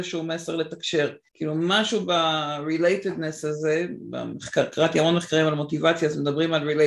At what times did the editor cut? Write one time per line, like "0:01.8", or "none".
0:01.3